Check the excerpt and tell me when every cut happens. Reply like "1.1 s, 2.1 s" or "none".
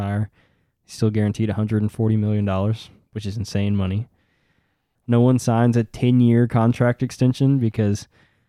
4.9 s